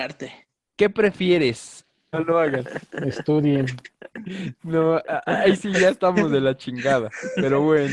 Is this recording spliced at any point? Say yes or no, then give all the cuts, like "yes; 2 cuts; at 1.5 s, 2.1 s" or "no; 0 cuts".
yes; 1 cut; at 2.1 s